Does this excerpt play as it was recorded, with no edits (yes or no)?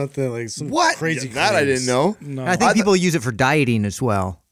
yes